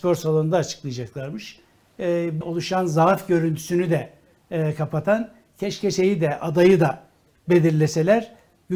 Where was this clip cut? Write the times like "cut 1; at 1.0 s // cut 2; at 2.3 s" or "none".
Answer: cut 1; at 2.4 s